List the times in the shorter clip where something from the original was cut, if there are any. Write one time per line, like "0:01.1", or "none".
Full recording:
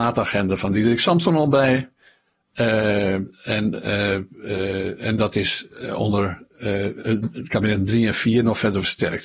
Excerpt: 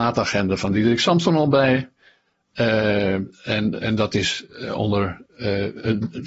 0:03.8